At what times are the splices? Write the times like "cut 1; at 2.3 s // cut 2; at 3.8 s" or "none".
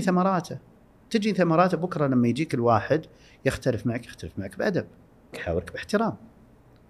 cut 1; at 5.3 s